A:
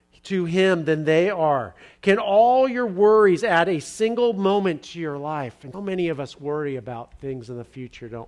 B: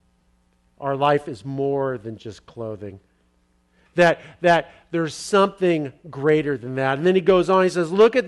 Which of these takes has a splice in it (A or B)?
A